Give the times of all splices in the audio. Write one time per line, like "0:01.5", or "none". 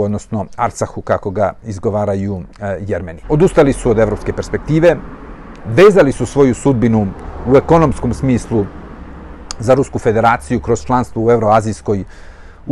0:03.2
0:05.6